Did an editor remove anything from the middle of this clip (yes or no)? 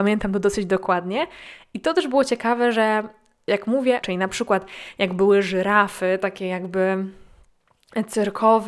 yes